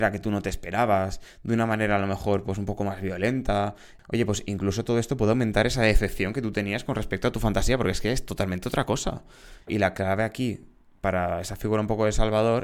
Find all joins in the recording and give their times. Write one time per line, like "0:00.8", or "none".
0:09.6